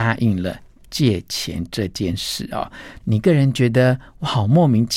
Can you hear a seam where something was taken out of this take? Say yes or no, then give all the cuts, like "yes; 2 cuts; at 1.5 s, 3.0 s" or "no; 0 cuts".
yes; 1 cut; at 3.0 s